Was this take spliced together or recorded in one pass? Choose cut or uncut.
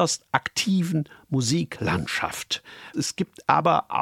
cut